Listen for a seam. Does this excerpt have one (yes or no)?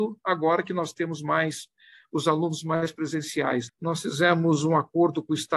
yes